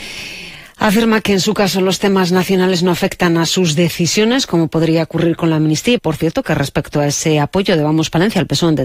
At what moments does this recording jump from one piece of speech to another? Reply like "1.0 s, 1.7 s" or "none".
6.0 s